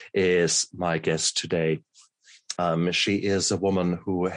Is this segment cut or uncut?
cut